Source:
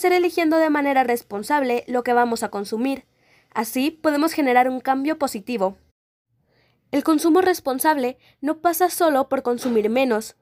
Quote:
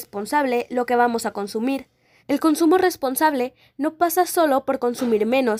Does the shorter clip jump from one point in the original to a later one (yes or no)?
yes